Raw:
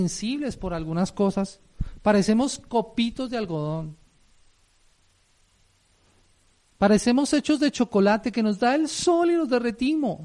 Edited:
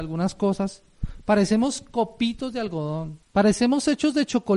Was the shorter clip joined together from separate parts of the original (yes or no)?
yes